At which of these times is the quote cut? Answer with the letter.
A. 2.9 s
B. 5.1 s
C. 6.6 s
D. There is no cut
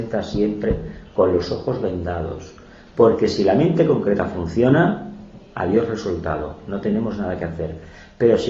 D